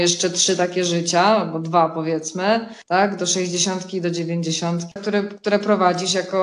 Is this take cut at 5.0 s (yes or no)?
yes